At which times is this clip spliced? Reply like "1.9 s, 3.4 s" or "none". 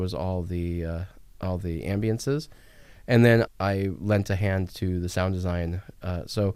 3.5 s